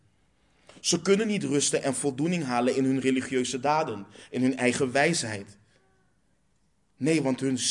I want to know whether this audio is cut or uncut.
uncut